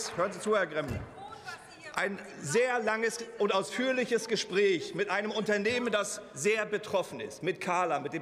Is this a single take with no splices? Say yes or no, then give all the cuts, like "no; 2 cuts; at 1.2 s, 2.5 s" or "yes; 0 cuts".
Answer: yes; 0 cuts